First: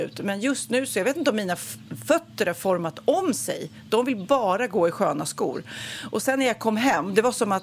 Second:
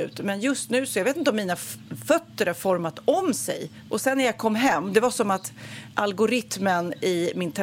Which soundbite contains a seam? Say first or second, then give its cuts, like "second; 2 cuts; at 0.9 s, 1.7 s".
second; 1 cut; at 3.9 s